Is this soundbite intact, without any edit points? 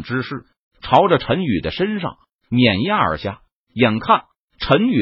yes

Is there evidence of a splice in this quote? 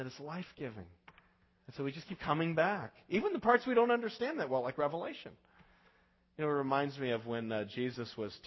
no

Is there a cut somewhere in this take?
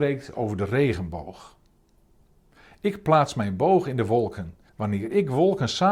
yes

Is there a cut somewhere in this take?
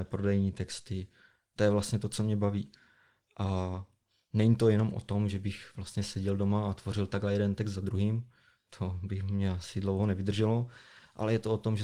no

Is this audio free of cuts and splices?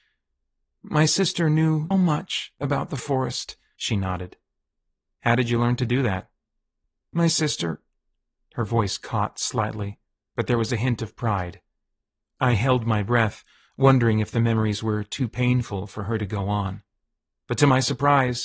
no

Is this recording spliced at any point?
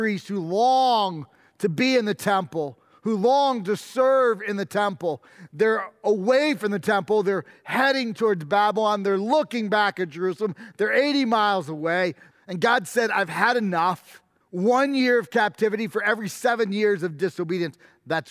yes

